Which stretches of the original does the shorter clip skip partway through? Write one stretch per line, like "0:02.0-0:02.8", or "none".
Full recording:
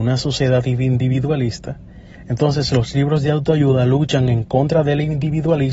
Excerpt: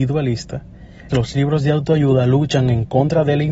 0:02.2-0:02.7